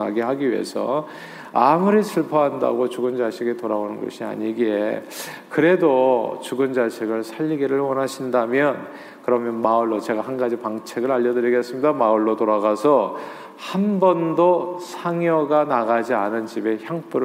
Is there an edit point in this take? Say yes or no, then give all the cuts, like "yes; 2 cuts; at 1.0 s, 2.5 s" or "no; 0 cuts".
no; 0 cuts